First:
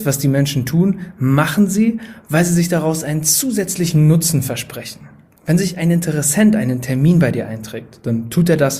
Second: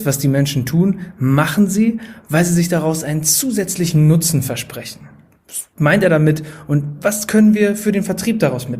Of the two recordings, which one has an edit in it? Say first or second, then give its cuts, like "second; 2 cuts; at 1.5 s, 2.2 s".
first; 1 cut; at 5.4 s